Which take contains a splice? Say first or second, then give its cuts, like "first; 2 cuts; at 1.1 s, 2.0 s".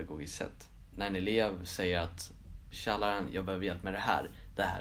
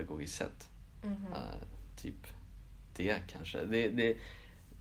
first; 2 cuts; at 0.9 s, 2.7 s